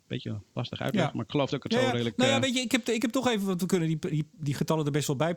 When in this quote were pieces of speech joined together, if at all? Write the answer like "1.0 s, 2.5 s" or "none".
none